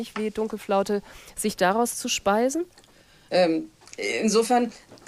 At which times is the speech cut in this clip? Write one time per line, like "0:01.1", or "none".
0:03.3